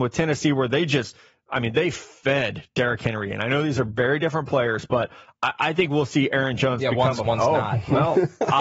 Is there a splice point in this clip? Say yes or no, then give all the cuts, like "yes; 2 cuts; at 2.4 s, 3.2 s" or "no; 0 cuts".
yes; 1 cut; at 7.2 s